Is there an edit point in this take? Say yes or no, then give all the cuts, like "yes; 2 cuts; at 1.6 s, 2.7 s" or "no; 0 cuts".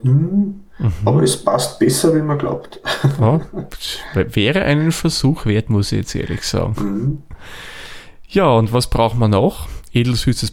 no; 0 cuts